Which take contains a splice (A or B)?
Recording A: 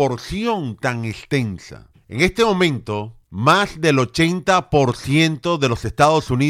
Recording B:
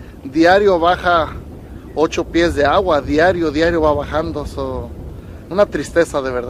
A